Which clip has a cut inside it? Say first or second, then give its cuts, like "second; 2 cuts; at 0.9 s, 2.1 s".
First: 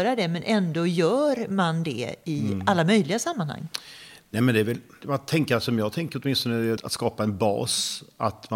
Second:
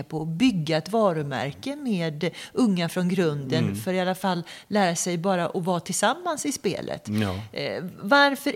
first; 2 cuts; at 5.0 s, 6.8 s